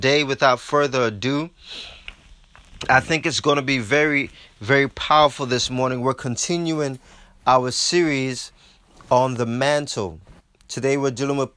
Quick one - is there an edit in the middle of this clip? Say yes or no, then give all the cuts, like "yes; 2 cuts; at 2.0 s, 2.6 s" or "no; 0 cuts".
no; 0 cuts